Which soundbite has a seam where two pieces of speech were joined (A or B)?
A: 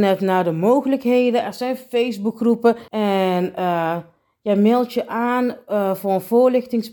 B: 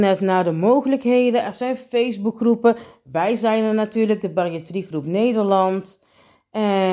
A